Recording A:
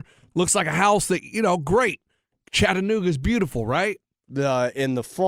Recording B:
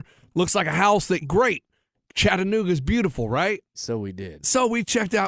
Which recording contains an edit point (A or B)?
B